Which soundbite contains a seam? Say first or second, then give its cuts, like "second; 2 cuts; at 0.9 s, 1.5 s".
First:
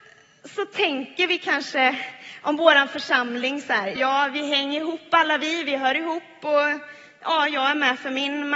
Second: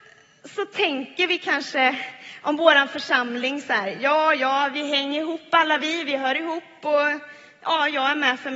first; 1 cut; at 4.0 s